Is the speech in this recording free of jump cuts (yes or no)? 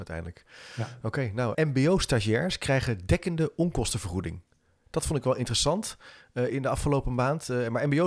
no